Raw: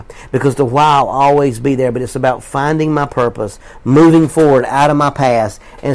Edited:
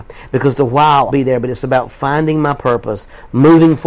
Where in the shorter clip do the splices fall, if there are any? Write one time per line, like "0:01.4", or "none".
0:01.1